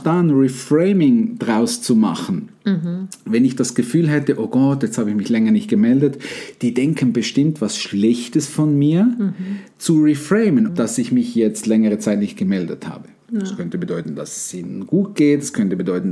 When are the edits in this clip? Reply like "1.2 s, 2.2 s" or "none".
10.7 s